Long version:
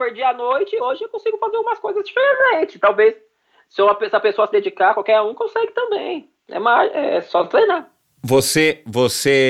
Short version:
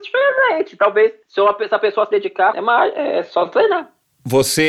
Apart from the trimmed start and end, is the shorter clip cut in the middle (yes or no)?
yes